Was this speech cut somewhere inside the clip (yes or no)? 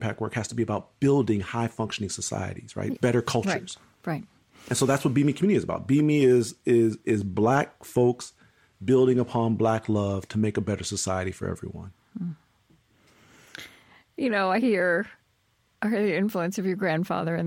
yes